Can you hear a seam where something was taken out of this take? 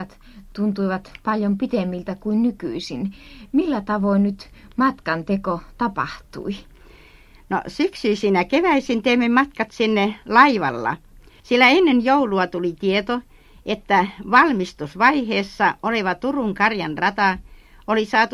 yes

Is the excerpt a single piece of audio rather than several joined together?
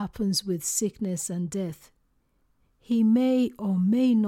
yes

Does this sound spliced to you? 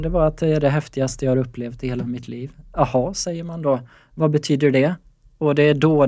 no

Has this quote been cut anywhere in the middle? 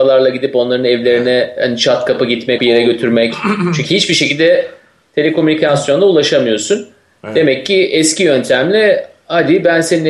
yes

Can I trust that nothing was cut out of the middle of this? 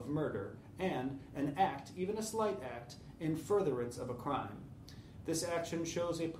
yes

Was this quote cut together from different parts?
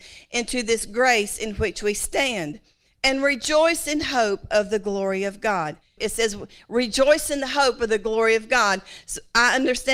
yes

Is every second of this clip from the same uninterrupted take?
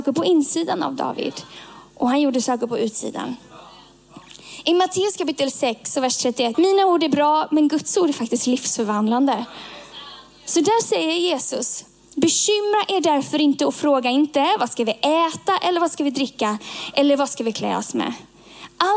no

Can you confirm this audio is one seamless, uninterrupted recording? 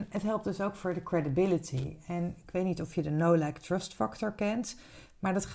yes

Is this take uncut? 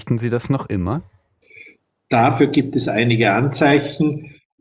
yes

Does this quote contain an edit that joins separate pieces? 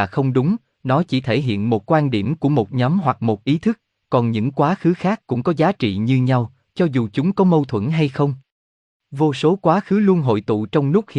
no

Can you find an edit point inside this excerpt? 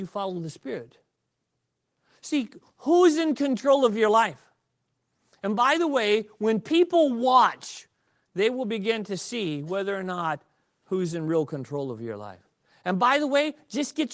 no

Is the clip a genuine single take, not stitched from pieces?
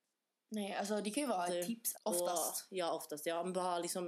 no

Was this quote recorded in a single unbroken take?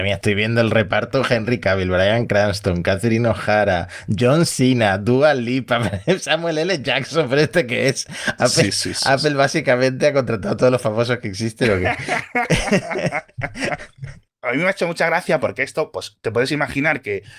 yes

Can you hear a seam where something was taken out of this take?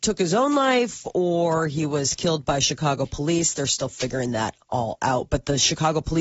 no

